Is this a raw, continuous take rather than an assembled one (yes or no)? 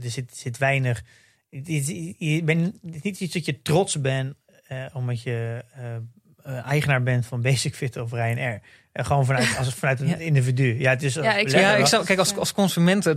yes